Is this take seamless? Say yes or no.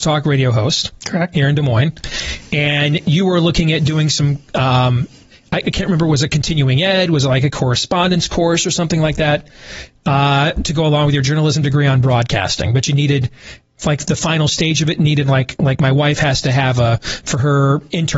yes